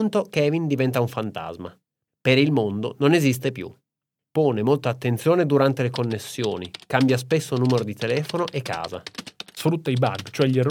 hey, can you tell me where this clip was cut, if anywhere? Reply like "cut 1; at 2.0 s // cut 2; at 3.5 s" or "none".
cut 1; at 4.2 s // cut 2; at 9.5 s